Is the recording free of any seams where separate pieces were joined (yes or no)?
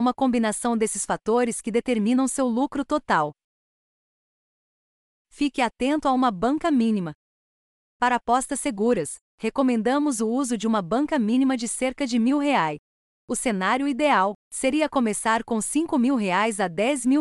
no